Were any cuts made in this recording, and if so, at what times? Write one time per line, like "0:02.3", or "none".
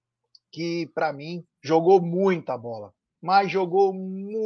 0:01.5